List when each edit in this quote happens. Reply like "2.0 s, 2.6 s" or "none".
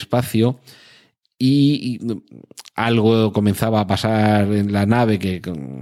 none